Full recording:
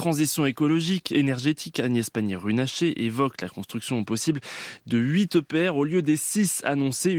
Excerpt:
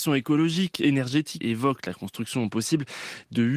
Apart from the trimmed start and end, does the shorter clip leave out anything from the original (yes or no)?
yes